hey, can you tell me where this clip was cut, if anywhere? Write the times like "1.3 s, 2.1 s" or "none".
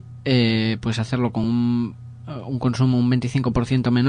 none